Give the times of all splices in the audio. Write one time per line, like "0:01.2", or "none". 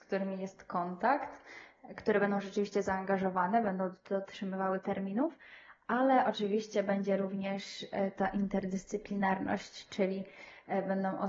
none